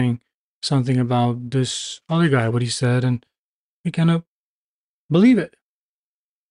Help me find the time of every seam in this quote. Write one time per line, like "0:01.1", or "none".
0:02.5